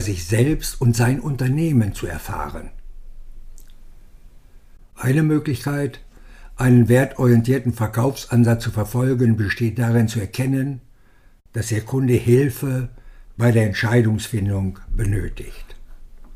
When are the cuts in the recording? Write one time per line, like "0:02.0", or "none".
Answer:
0:04.8